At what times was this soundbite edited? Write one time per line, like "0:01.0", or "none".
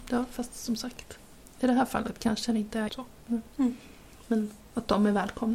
0:02.9